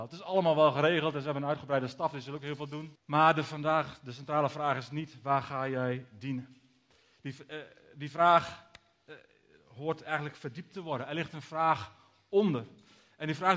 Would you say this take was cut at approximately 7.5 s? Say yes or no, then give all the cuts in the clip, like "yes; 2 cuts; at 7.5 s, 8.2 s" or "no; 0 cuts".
no; 1 cut; at 3.0 s